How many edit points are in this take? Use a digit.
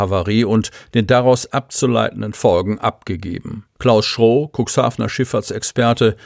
1